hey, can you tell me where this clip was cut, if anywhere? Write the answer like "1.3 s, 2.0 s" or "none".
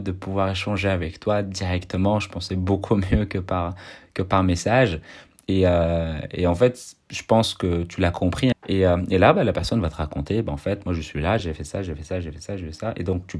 8.5 s, 11.4 s